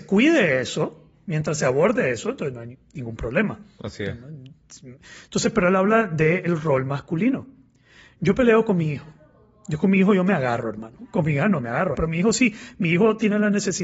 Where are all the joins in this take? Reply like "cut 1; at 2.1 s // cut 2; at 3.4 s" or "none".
cut 1; at 11.9 s